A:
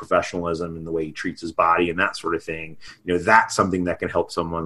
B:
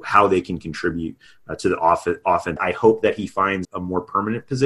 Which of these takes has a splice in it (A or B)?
B